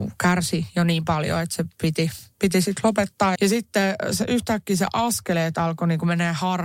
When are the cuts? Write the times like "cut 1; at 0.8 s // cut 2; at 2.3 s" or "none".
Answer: cut 1; at 3.3 s